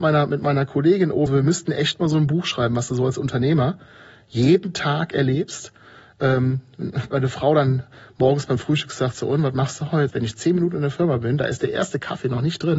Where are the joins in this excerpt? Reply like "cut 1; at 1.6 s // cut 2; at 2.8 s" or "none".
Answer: cut 1; at 1.3 s // cut 2; at 10.1 s

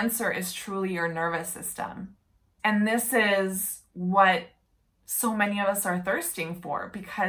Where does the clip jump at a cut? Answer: cut 1; at 2.6 s

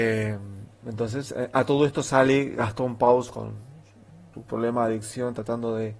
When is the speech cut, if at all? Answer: cut 1; at 4.3 s

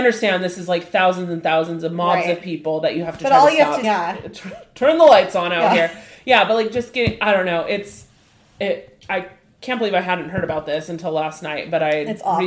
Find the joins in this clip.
cut 1; at 3.8 s

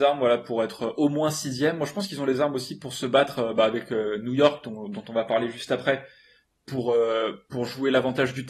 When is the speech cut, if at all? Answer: none

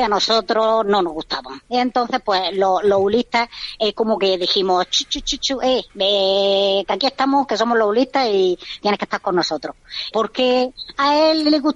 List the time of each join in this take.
cut 1; at 5.9 s // cut 2; at 10.1 s

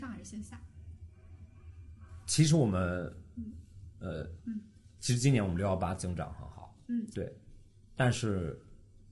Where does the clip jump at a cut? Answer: cut 1; at 4.4 s // cut 2; at 7.1 s

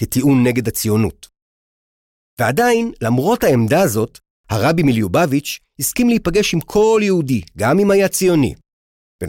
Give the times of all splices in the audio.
none

